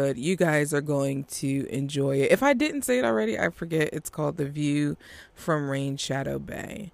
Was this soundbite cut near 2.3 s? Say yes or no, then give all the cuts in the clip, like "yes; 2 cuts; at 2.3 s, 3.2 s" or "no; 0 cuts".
no; 0 cuts